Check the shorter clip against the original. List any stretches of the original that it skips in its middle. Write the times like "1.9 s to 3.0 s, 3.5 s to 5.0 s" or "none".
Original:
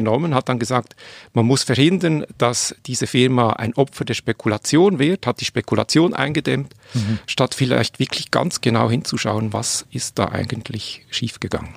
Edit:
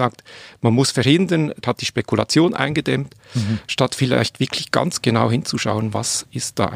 2.3 s to 5.2 s